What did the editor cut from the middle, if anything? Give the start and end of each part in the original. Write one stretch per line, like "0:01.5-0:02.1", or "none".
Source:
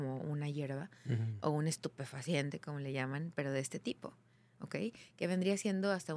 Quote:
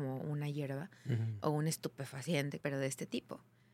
0:02.6-0:03.3

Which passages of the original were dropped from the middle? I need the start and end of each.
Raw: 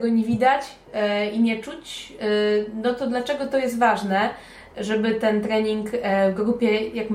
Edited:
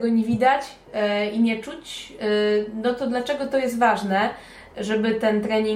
none

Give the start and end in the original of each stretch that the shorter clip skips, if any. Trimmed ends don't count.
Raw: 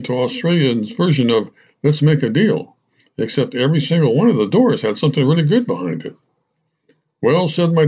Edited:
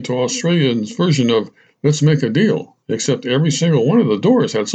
0:02.8-0:03.1

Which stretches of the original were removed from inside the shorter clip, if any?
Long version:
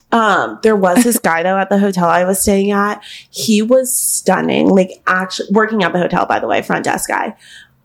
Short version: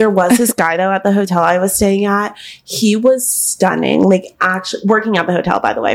none

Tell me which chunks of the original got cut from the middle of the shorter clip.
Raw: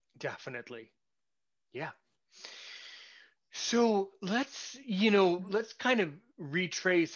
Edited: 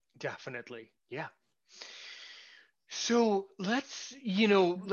0:01.0-0:01.6

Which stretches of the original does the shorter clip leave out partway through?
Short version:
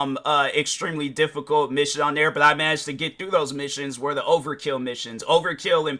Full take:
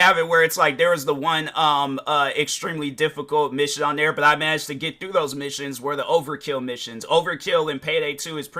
none

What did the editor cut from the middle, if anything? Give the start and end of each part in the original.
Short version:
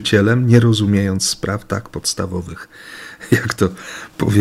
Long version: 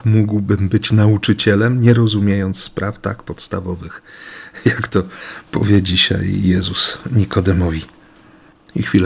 none

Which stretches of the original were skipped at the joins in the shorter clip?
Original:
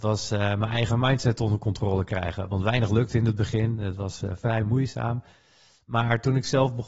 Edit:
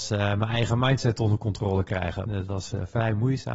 0:02.5-0:03.8

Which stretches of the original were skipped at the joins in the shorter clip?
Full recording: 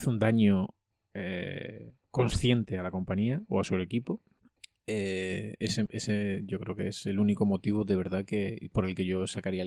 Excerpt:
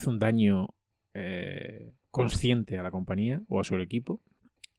none

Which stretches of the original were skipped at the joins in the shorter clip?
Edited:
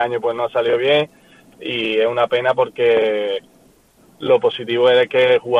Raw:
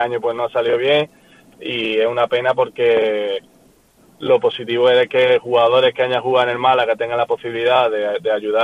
none

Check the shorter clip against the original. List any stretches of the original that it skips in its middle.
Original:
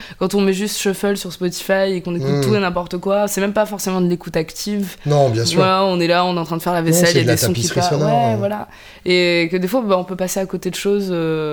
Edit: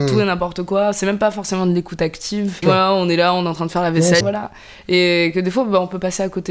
0:05.0-0:05.5
0:07.1-0:08.4

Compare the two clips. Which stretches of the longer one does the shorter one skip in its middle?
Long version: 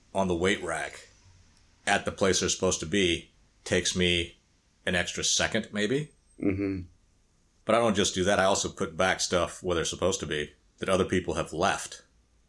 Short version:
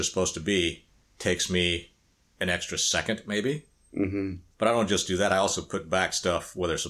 0:07.0-0:07.6

